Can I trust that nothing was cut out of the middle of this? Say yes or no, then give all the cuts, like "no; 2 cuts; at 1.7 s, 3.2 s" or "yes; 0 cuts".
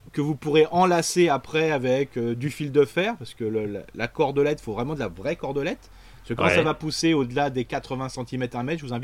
yes; 0 cuts